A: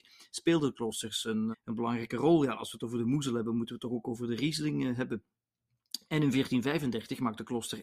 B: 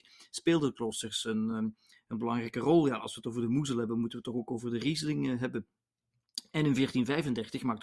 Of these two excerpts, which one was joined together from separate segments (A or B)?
A